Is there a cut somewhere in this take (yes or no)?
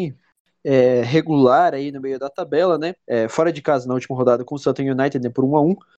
yes